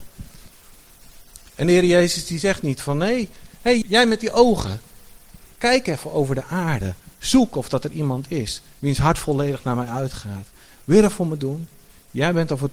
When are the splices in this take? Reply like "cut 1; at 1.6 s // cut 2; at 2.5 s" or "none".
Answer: cut 1; at 3.8 s